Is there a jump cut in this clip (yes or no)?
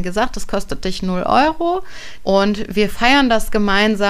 yes